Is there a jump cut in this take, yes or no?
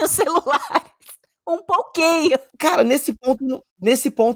no